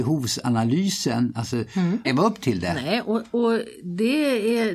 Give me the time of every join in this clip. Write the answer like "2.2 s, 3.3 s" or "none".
2.0 s

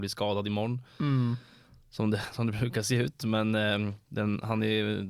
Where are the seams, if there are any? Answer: 4.0 s

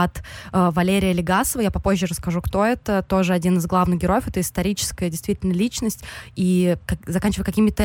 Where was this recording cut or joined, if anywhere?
none

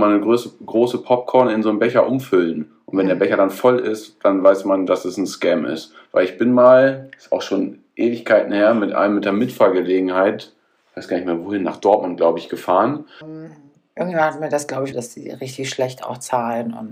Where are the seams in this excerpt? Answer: 13.2 s, 14.9 s

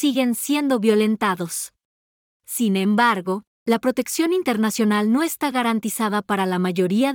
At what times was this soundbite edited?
2.3 s, 3.6 s

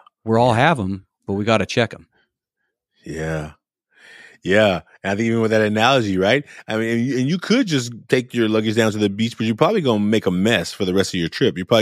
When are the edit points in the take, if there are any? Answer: none

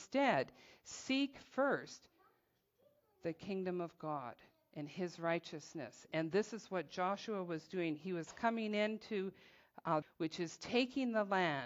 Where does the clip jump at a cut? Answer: 10.0 s

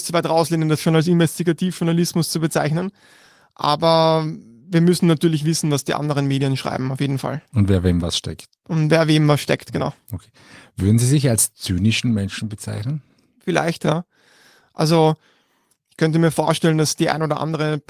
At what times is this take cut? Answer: none

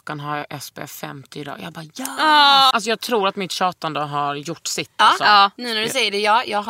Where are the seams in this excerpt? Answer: 2.7 s

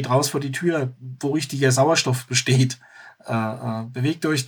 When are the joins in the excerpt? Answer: none

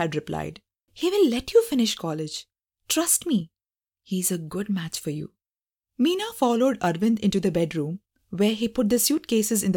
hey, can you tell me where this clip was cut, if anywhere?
none

